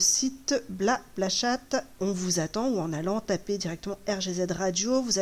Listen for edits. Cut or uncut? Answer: cut